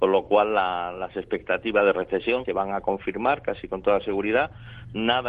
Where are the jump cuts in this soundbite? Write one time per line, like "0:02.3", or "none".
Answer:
0:02.5